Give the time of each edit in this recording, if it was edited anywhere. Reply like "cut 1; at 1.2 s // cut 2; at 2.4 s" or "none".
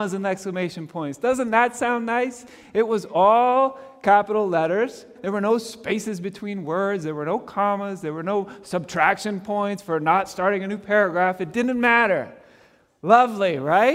cut 1; at 5.2 s